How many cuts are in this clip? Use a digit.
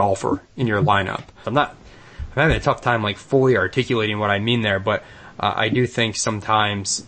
1